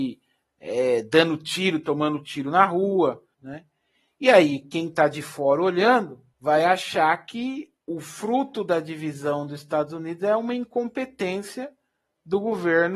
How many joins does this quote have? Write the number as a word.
three